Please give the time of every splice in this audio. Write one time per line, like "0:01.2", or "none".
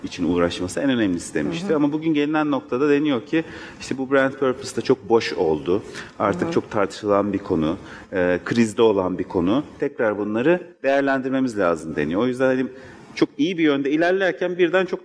none